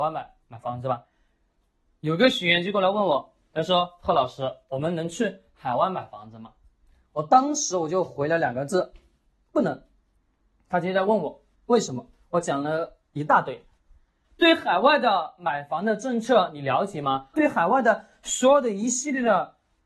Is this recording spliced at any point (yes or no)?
yes